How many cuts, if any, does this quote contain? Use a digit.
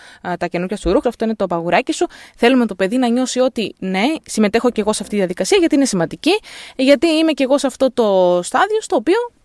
1